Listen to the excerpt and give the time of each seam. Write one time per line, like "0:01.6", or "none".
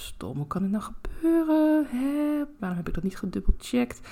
0:02.6